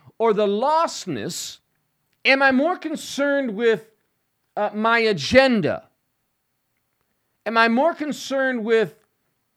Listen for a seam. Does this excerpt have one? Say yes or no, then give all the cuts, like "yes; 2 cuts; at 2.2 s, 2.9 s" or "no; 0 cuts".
yes; 1 cut; at 2.1 s